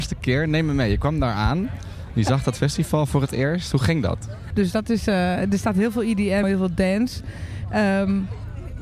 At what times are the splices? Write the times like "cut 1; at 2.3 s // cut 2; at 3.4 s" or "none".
cut 1; at 4.5 s // cut 2; at 6.4 s